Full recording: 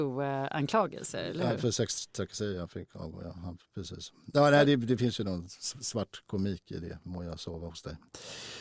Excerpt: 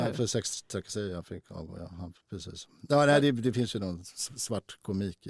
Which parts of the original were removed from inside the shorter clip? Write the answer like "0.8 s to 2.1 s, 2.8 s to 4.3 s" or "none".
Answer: none

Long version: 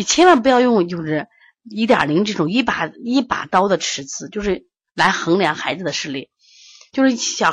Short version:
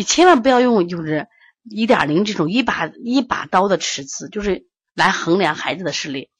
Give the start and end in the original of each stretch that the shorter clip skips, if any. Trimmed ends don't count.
none

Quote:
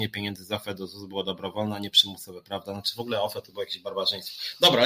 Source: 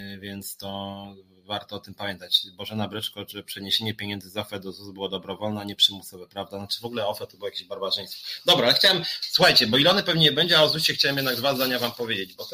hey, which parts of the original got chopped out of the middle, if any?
none

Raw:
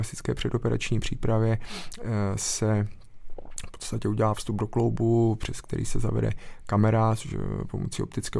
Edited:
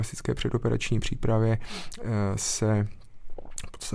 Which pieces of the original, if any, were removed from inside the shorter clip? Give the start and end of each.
none

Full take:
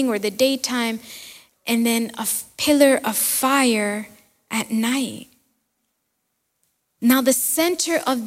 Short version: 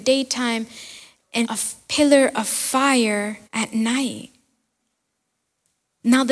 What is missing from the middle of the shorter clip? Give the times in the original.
1.8 s to 2.1 s, 4.1 s to 4.4 s

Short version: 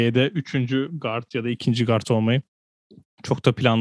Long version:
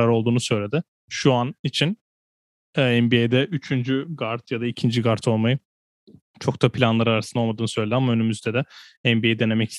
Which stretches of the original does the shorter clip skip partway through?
none

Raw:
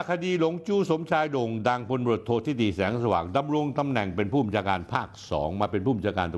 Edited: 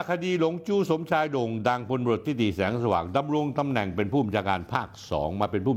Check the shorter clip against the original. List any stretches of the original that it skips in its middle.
2.2 s to 2.4 s

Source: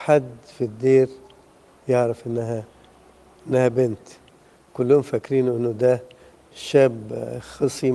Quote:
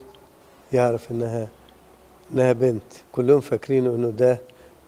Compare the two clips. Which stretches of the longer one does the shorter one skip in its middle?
4.2 s to 4.6 s

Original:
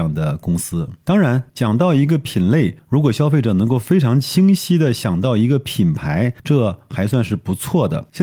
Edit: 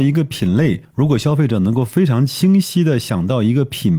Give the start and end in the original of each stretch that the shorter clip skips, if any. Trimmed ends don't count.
none

